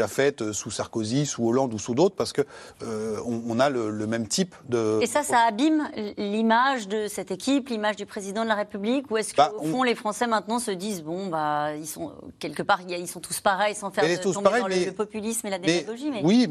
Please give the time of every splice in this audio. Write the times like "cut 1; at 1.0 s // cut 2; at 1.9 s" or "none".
none